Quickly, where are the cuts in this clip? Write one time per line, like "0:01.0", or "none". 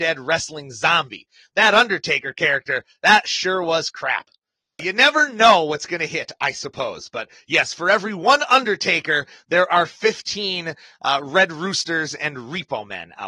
0:04.8